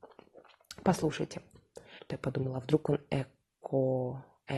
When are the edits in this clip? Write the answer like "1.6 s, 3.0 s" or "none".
2.0 s